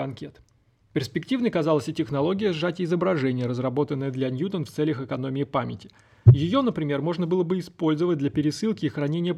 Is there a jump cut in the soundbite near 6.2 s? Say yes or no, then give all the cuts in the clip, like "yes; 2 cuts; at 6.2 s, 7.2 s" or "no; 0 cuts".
no; 0 cuts